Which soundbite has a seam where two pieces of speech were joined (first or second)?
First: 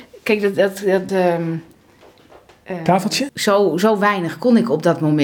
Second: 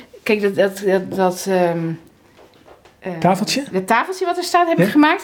first